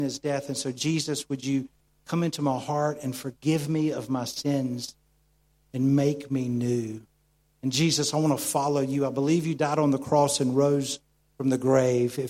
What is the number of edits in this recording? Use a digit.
0